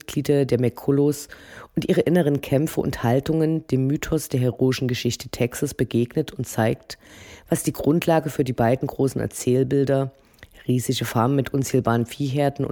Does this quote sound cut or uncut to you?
uncut